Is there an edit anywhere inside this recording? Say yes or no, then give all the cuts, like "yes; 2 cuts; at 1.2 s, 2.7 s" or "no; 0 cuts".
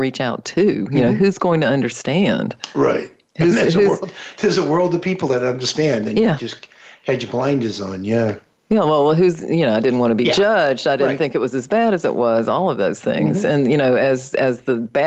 no; 0 cuts